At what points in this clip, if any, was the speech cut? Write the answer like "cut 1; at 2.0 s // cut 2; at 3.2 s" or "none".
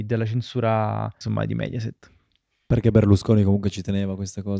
none